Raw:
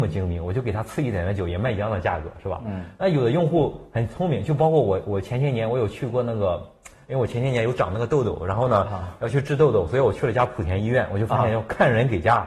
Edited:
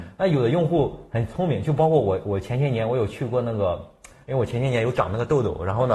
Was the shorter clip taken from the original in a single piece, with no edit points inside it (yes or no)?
yes